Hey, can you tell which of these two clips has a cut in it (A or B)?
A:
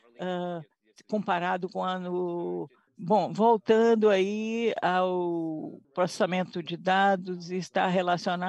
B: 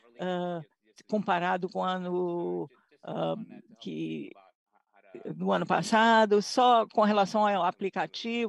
A